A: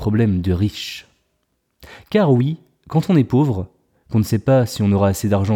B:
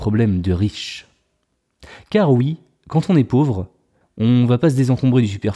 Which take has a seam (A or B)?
B